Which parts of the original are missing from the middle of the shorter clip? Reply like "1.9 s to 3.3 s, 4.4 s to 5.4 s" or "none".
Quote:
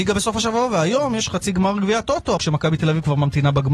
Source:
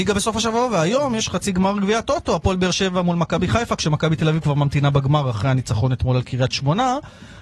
2.4 s to 3.8 s